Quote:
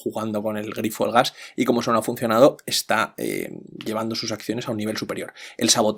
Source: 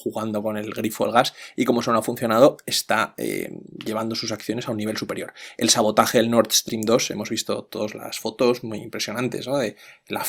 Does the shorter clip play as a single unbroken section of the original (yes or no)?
yes